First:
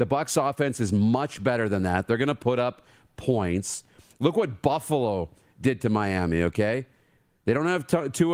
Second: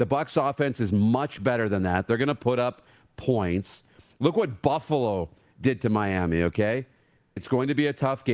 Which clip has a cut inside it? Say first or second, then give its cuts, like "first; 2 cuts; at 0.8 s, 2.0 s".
second; 1 cut; at 7.4 s